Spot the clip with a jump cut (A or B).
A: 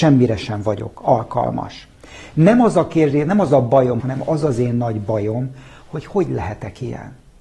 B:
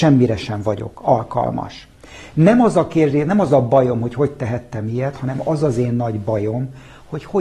A